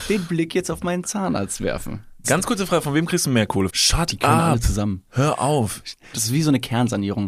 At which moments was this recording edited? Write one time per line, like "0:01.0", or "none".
0:02.2
0:03.7
0:06.1